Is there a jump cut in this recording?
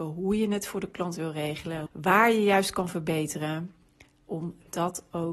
yes; 1 cut; at 1.9 s

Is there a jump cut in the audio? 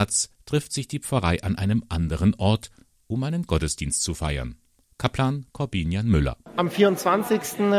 no; 0 cuts

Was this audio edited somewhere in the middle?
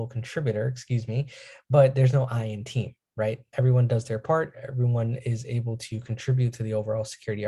no; 0 cuts

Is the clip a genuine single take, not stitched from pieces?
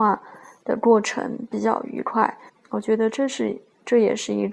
no; 1 cut; at 2.5 s

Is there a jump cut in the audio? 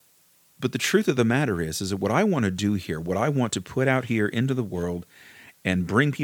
no; 0 cuts

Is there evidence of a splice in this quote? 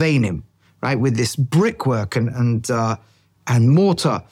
no; 0 cuts

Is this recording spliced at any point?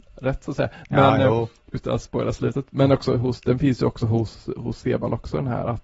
no; 0 cuts

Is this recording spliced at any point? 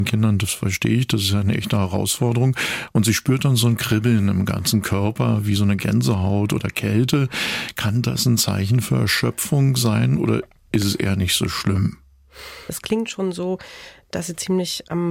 yes; 1 cut; at 12.7 s

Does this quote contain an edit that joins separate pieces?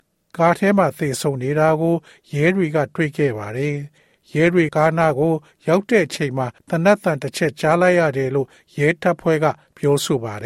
yes; 2 cuts; at 4.7 s, 6.6 s

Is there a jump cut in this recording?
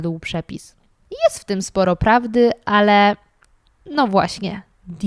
no; 0 cuts

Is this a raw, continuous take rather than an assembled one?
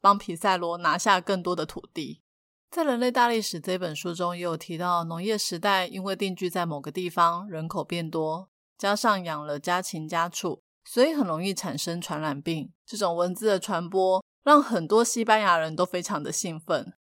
no; 1 cut; at 12.8 s

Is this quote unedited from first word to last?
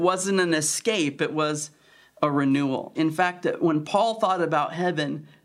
no; 1 cut; at 2.9 s

